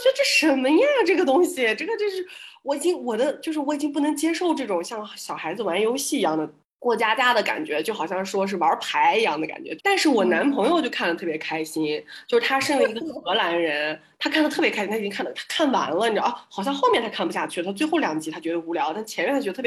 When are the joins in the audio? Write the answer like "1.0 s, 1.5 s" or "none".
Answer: 9.8 s